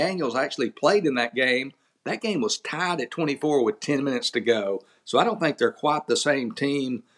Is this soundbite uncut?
yes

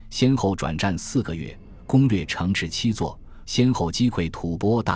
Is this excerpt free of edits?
no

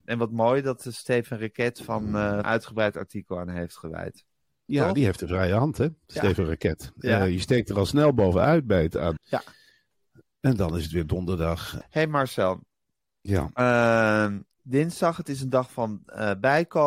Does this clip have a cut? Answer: yes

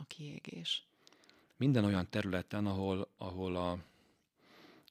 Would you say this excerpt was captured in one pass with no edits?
yes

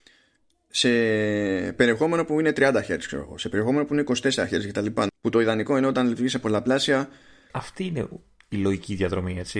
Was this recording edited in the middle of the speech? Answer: yes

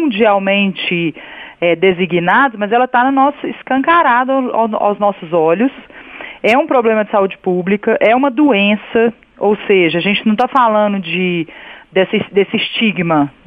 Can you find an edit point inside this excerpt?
no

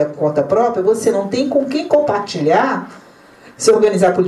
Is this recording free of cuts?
yes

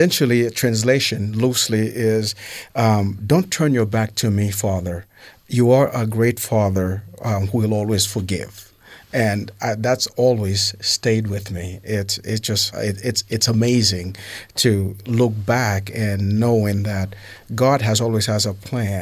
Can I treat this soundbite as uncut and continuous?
no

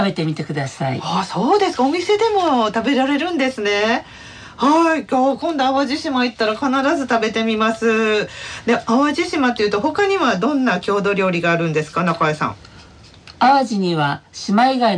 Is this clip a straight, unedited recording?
yes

